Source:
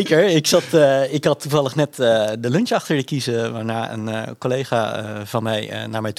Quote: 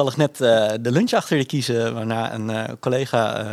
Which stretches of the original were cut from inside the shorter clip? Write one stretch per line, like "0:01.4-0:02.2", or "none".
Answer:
none

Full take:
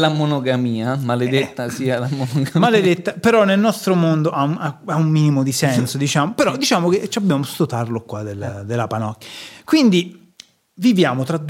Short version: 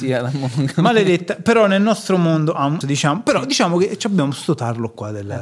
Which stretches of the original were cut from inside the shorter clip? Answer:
0:04.6-0:05.9

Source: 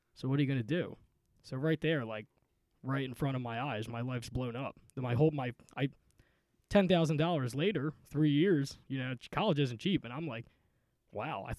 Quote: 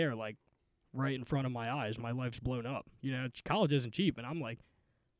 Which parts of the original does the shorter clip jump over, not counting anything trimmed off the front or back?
0:04.9-0:08.8

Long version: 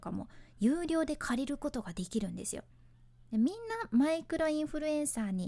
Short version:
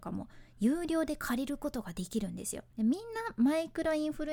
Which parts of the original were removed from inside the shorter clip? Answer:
0:02.7-0:03.2

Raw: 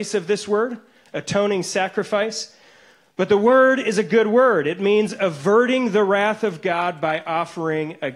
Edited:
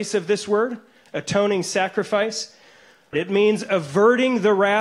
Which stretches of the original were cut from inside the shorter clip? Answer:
0:03.1-0:04.6

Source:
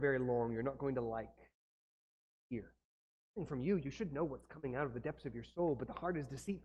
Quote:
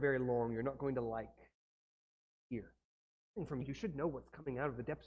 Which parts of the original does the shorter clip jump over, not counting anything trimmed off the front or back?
0:03.6-0:03.8

